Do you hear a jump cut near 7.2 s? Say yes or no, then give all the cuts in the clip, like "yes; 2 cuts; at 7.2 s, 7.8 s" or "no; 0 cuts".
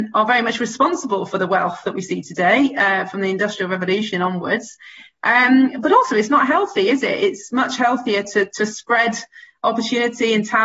no; 0 cuts